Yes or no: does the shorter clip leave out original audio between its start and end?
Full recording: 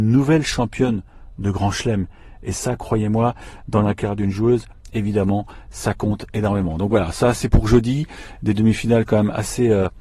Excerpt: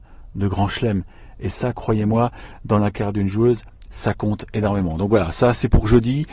yes